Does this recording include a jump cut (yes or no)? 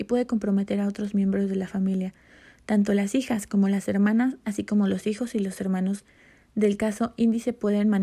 no